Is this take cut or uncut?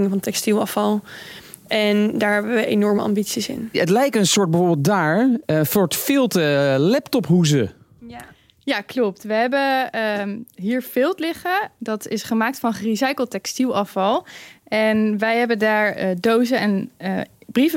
uncut